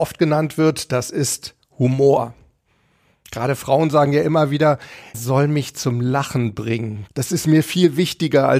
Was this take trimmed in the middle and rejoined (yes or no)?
yes